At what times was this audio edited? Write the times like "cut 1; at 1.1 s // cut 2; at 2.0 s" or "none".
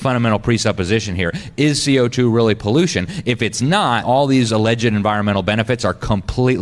cut 1; at 4.0 s